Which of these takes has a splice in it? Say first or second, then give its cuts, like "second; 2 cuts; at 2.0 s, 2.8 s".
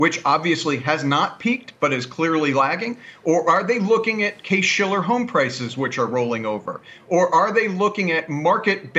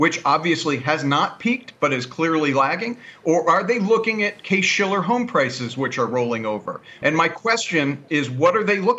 second; 2 cuts; at 7.0 s, 8.1 s